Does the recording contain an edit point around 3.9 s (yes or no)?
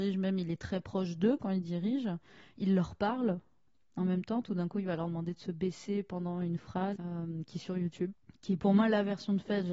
no